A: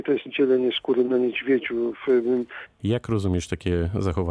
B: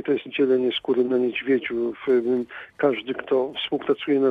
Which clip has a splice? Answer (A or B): A